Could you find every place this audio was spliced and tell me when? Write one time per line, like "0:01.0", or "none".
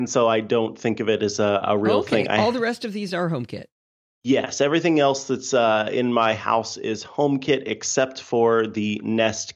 none